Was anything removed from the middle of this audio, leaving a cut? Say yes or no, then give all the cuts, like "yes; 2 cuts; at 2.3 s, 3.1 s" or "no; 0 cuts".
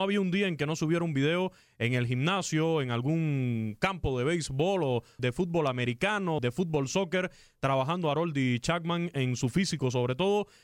yes; 2 cuts; at 5.2 s, 6.4 s